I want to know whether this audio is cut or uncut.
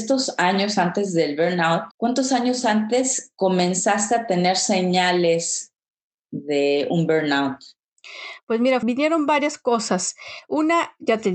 cut